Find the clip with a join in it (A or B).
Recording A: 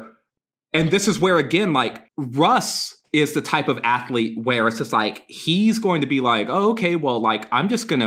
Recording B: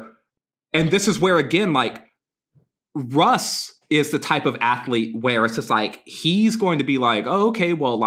A